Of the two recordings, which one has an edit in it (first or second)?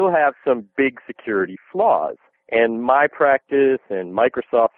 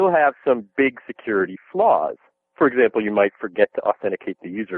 first